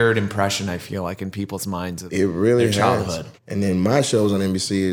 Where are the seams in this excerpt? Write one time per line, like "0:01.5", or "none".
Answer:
0:03.4